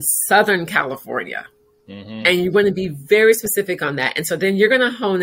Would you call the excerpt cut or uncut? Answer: uncut